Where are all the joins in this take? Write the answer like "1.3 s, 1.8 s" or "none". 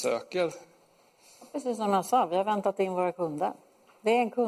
none